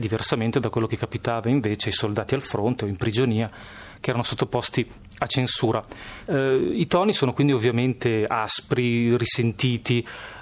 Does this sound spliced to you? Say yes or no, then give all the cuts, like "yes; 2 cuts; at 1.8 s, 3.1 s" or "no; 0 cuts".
yes; 1 cut; at 6.3 s